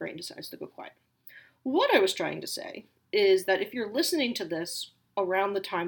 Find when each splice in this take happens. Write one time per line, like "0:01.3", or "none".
none